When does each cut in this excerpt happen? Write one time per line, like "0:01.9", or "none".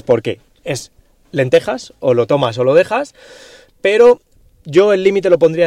none